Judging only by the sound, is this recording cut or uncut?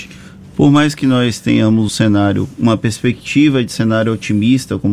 cut